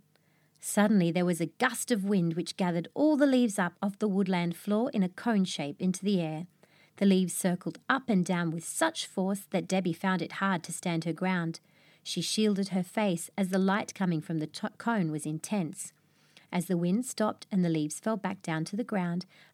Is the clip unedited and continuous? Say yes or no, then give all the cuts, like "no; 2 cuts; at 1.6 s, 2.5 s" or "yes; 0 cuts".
yes; 0 cuts